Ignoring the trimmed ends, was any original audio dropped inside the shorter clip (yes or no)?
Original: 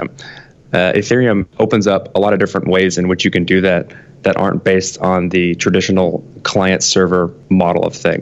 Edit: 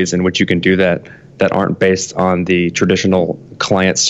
no